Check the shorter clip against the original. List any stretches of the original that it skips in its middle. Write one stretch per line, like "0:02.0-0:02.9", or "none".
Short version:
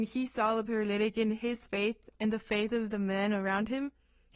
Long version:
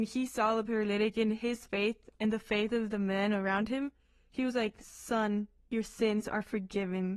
none

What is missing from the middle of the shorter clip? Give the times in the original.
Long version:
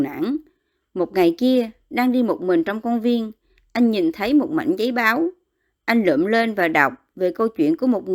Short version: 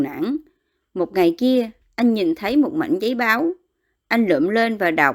0:01.8-0:03.6

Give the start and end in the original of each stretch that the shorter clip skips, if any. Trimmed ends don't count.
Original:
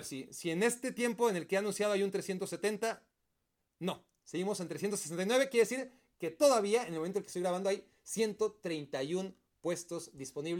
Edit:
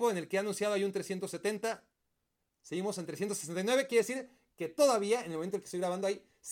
0:03.8-0:04.2

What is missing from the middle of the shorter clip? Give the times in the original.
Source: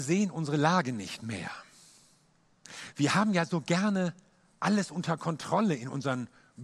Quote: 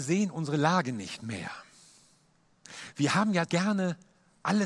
0:03.4-0:03.6

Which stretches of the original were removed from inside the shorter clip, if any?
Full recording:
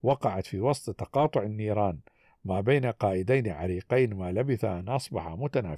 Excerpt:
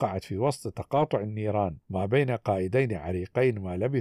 0:02.0-0:02.4

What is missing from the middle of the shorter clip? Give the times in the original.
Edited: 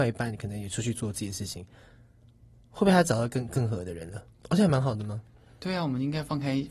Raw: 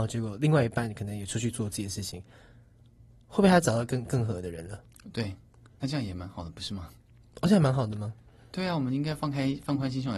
0:04.9-0:07.2

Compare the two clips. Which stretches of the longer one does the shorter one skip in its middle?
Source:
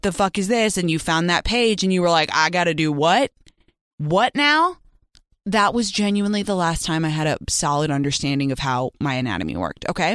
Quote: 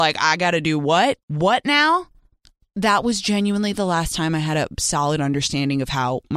0:03.4-0:03.9

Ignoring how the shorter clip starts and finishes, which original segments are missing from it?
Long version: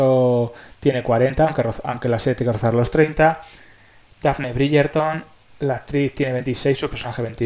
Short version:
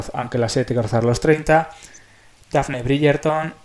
none

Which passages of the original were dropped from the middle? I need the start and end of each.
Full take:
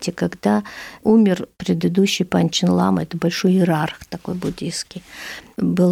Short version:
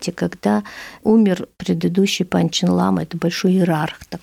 none

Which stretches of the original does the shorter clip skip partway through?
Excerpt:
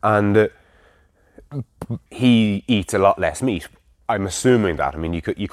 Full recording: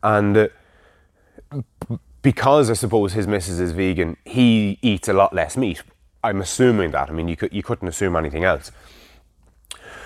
0:02.1-0:04.2

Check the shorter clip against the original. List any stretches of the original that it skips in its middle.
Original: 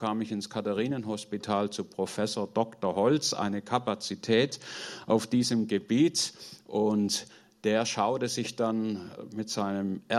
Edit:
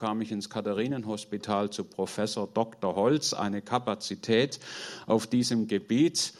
none

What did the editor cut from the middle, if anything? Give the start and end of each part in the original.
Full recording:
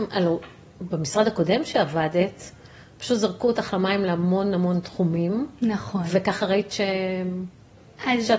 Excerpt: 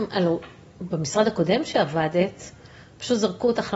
none

